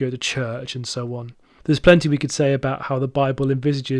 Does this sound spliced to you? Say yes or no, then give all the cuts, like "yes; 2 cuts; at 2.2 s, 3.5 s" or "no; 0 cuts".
yes; 1 cut; at 1.6 s